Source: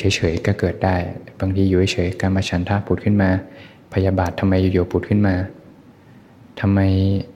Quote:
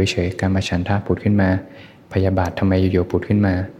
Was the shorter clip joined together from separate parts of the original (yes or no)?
no